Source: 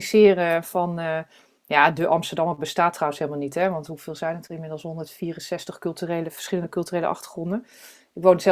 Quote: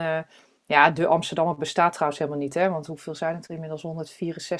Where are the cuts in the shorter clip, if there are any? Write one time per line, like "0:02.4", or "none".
none